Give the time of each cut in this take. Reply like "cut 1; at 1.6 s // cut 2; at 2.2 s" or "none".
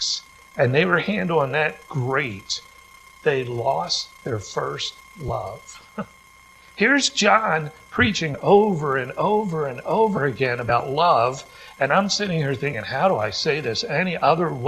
cut 1; at 3.1 s